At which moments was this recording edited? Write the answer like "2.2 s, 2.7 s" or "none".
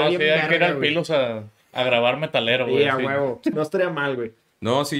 3.5 s